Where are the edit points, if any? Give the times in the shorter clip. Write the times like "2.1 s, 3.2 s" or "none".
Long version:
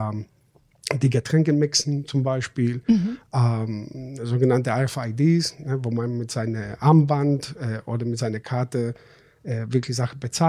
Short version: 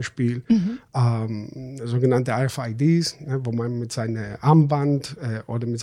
none